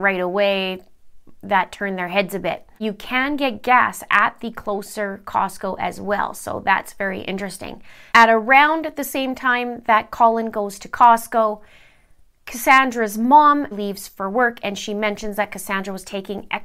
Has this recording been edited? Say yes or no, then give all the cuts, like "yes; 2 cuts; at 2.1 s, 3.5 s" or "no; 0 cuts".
yes; 2 cuts; at 8.1 s, 13.7 s